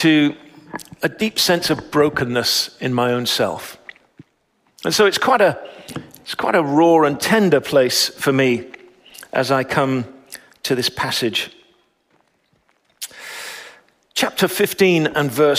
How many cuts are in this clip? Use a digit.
1